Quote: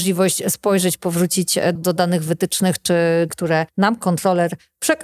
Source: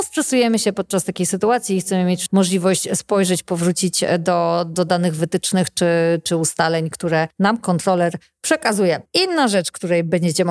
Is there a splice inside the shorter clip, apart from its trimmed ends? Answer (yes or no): yes